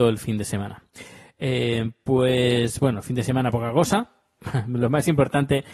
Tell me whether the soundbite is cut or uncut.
uncut